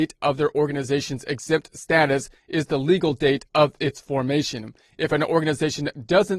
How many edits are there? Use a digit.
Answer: 0